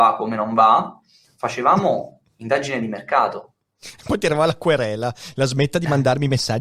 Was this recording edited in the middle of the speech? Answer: no; 0 cuts

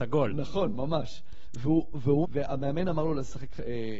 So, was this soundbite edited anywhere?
yes; 1 cut; at 2.2 s

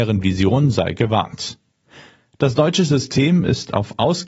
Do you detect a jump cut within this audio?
no; 0 cuts

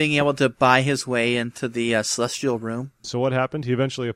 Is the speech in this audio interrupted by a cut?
yes; 1 cut; at 3.0 s

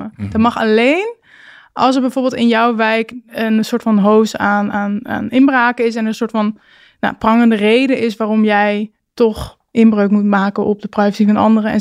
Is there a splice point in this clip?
no; 0 cuts

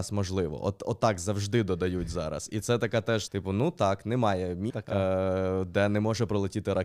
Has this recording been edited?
yes; 2 cuts; at 3.3 s, 4.7 s

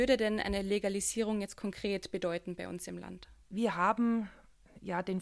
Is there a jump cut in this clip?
yes; 1 cut; at 3.4 s

